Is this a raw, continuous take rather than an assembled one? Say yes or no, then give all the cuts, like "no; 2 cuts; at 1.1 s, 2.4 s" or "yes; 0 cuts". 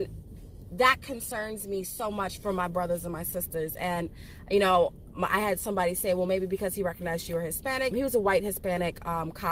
no; 1 cut; at 7.9 s